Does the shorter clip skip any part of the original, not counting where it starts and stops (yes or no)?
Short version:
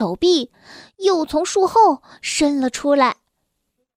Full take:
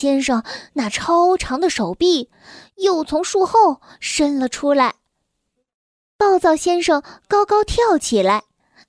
no